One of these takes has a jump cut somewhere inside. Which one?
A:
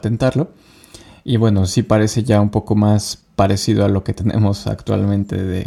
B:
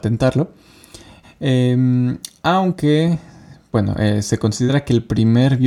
B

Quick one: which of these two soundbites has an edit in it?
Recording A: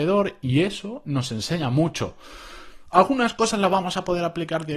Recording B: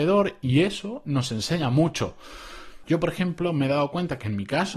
B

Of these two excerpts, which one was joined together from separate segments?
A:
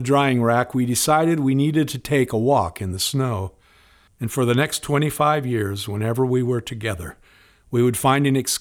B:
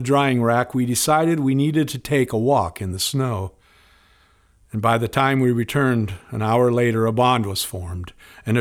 A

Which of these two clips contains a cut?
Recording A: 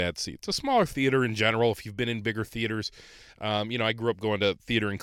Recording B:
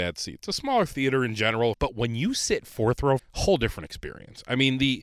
B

